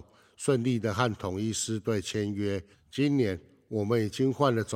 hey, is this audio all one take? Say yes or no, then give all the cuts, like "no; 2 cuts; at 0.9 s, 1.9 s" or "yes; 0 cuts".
no; 1 cut; at 2.7 s